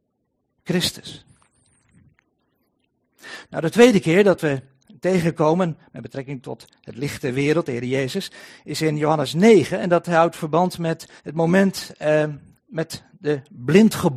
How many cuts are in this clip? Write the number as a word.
one